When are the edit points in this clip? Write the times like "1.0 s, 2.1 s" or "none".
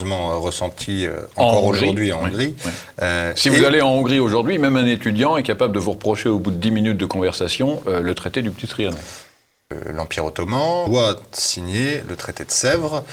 none